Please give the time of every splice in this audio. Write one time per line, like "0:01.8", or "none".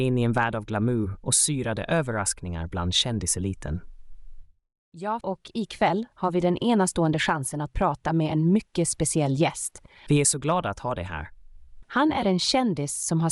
0:05.2
0:10.1
0:11.8